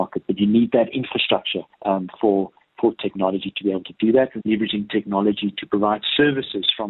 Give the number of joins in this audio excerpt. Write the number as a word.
two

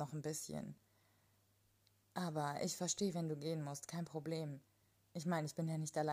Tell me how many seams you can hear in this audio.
zero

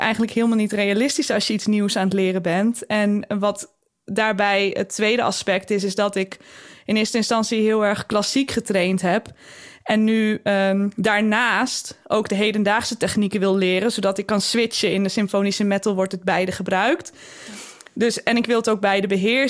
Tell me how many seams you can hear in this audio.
zero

